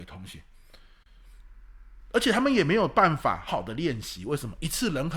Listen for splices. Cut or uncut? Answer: cut